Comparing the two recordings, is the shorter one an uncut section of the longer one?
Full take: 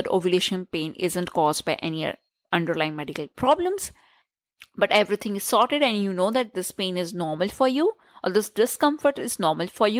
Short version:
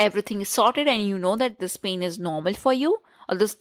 yes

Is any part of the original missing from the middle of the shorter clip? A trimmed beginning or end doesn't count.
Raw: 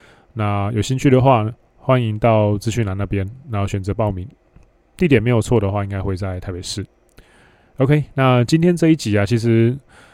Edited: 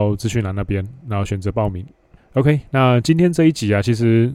yes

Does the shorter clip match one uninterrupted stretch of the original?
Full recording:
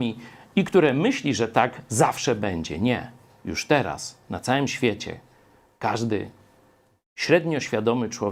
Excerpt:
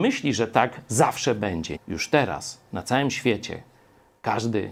no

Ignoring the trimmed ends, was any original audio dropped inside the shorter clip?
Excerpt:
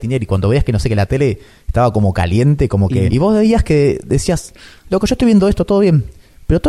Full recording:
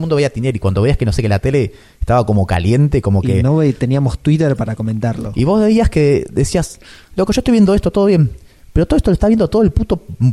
yes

